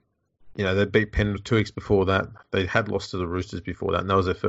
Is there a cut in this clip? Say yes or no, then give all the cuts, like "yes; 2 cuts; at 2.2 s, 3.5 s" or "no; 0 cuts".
no; 0 cuts